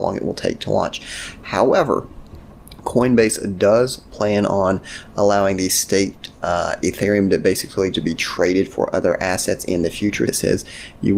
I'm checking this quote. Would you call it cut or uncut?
cut